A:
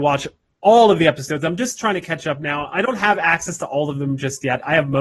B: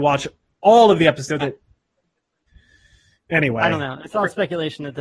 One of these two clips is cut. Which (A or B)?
B